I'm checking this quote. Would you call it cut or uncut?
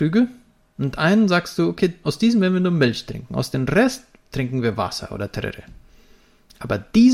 cut